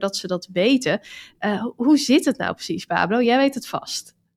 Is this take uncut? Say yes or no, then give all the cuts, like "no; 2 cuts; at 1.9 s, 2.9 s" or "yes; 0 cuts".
yes; 0 cuts